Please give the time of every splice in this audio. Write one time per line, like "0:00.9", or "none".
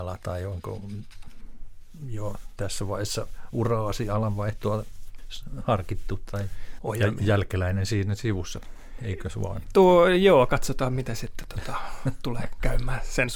0:06.8